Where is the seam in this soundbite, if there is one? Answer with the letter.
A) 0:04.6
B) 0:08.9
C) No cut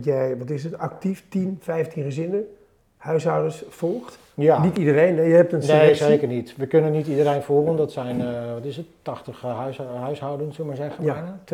C